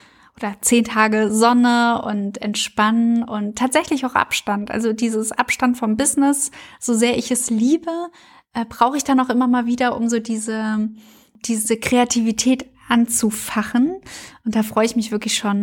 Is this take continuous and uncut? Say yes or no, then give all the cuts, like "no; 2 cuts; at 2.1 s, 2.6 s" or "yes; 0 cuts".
yes; 0 cuts